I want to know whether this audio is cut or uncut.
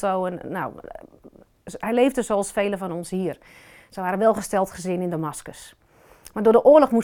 uncut